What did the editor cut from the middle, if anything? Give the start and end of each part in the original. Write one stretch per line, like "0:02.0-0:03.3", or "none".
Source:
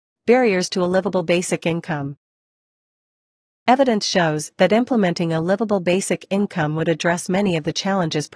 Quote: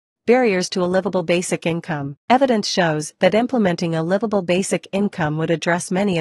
0:02.2-0:03.6